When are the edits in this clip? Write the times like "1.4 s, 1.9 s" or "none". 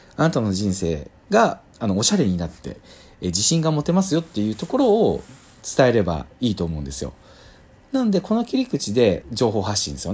9.2 s